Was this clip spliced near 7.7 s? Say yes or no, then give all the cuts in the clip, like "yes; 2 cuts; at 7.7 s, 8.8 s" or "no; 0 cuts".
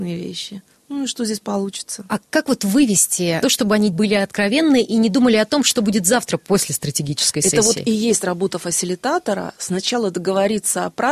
no; 1 cut; at 3.4 s